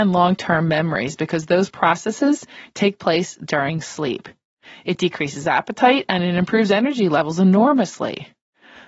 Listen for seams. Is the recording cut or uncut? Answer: uncut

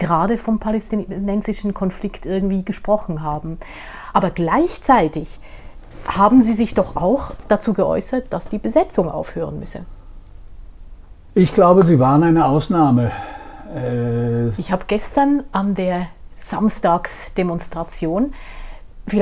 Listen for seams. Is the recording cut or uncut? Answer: cut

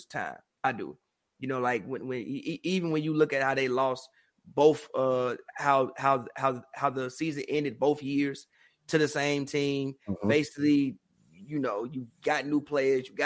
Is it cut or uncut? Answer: uncut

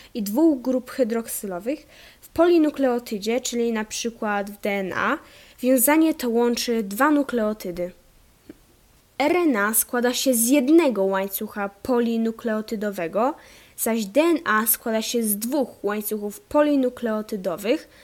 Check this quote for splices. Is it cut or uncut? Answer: uncut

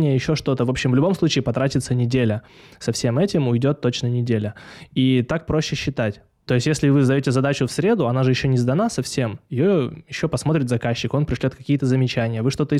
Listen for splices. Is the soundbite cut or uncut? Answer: uncut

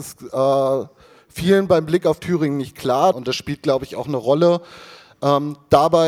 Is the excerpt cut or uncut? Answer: cut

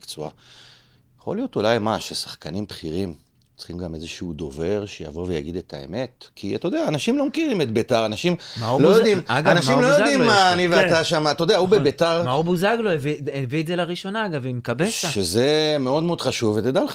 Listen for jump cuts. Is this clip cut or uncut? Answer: uncut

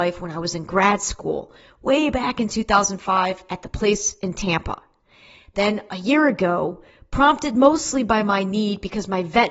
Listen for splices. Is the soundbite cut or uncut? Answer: uncut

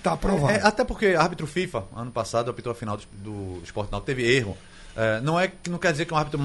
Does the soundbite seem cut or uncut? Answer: uncut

